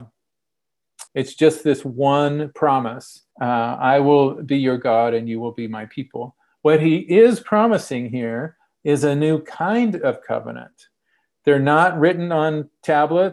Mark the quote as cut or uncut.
cut